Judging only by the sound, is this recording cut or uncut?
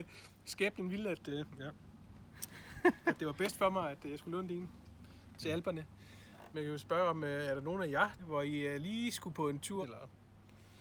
cut